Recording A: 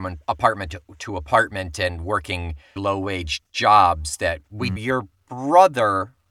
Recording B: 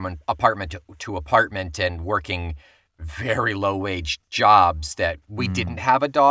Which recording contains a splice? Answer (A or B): A